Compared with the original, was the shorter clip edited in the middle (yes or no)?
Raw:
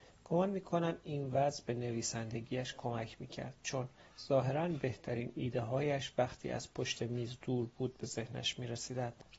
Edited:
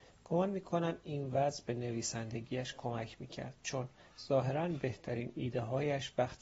no